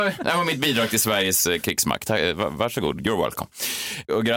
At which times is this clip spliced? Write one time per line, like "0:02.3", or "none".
none